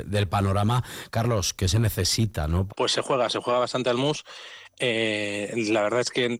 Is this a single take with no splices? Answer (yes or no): no